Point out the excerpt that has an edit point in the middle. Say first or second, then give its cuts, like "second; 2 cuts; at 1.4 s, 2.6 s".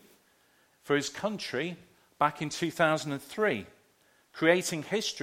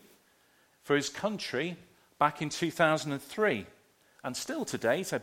second; 1 cut; at 4.2 s